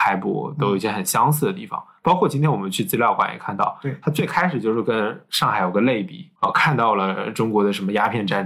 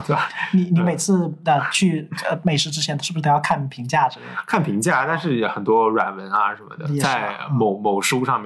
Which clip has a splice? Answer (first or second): first